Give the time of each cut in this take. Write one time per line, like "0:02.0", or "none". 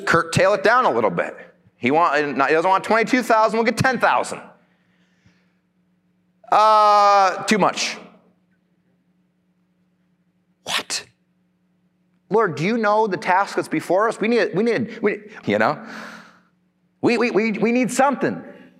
0:15.4
0:17.2